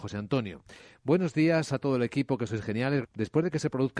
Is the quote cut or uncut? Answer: cut